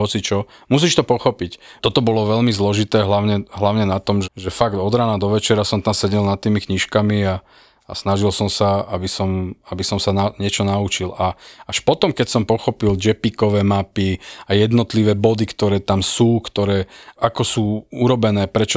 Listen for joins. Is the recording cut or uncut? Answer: cut